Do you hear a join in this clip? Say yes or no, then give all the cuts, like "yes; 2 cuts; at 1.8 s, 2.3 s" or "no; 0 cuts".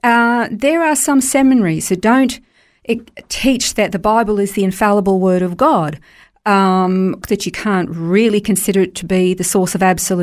yes; 1 cut; at 7.2 s